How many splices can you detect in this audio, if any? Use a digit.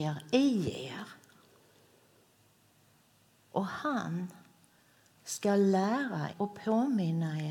1